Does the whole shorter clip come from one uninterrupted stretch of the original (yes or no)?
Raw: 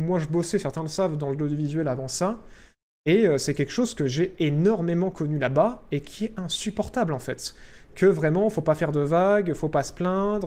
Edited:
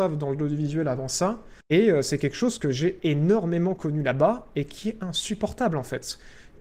no